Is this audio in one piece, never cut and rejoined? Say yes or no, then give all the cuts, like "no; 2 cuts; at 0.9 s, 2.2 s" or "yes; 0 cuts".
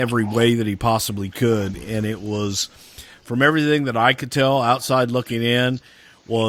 yes; 0 cuts